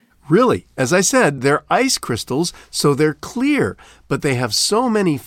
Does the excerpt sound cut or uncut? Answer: uncut